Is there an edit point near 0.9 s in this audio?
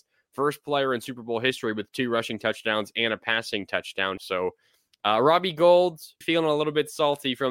no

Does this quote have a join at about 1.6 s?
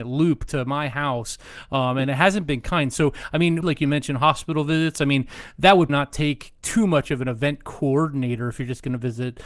no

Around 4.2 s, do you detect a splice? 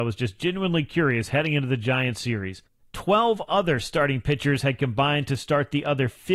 no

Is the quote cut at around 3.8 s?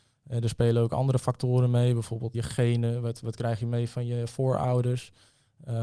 no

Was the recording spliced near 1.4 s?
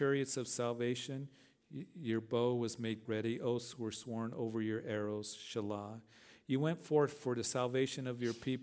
no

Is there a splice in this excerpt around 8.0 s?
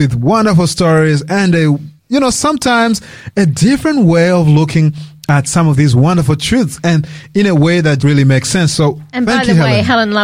yes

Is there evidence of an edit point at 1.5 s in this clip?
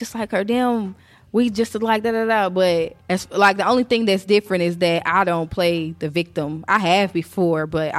no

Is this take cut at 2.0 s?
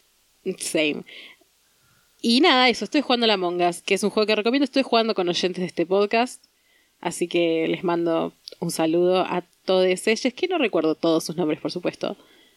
no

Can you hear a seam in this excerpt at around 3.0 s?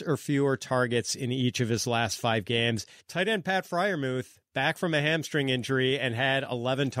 yes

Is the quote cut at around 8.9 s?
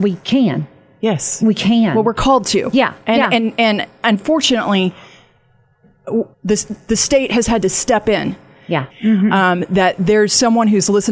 yes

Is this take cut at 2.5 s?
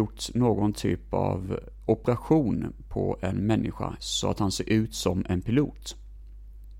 no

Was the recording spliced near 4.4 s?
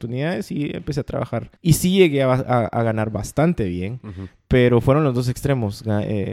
no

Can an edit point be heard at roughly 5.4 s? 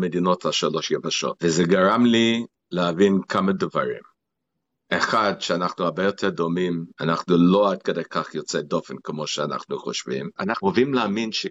no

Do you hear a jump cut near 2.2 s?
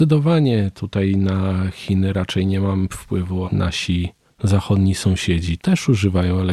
no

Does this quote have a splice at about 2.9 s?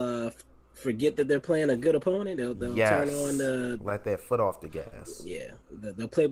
no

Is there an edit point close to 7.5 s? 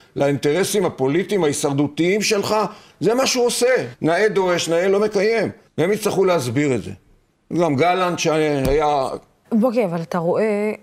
no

